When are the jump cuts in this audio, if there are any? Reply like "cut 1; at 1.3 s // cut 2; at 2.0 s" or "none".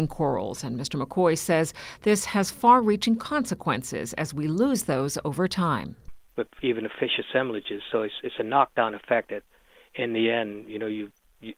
none